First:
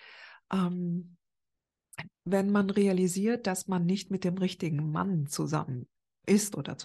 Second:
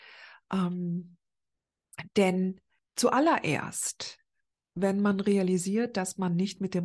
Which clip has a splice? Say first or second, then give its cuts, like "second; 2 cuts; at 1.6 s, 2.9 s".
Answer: first; 1 cut; at 2.1 s